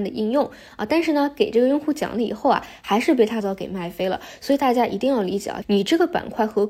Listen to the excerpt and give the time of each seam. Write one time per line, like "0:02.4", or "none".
0:03.4
0:05.6